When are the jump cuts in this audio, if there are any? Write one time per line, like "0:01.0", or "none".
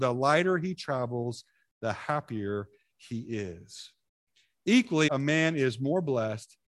0:05.1